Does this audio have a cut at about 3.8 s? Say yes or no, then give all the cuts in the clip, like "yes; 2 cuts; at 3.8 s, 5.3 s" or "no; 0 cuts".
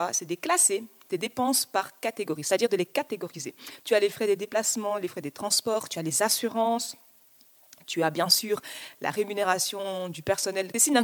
yes; 1 cut; at 3.8 s